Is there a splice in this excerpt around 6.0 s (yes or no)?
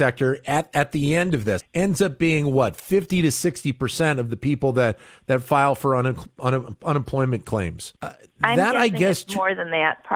no